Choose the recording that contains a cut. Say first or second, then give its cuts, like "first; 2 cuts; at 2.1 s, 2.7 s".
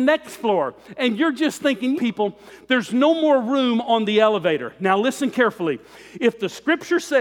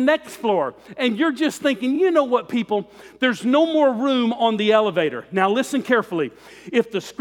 first; 1 cut; at 2.0 s